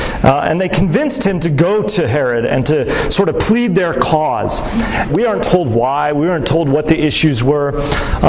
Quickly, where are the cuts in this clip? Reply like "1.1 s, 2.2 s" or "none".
5.1 s